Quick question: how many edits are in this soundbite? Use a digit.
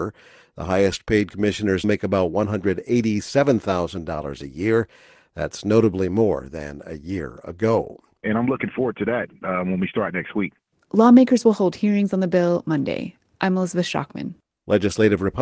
2